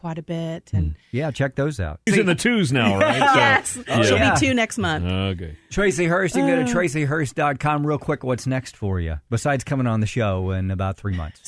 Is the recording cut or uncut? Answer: cut